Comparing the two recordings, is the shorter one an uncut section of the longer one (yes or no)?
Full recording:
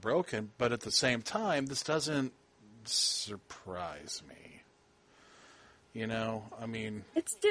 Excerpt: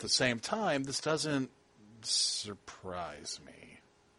yes